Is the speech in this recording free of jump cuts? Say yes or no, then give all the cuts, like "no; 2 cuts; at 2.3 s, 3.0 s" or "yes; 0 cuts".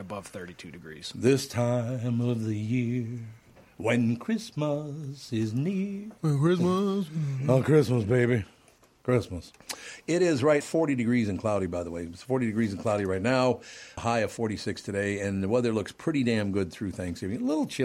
no; 2 cuts; at 10.6 s, 14.0 s